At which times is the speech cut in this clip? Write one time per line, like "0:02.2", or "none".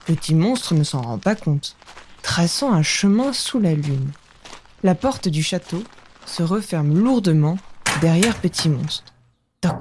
0:02.2

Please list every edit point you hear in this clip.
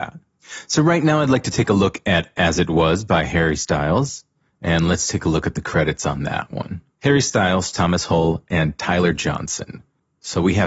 none

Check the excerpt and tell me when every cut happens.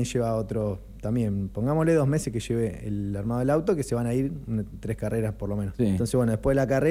0:05.8

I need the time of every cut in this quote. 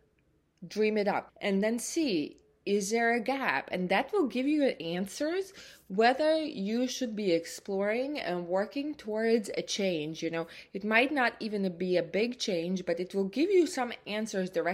0:01.3

